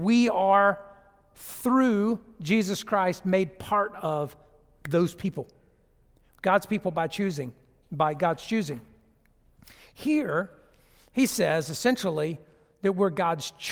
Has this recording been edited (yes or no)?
yes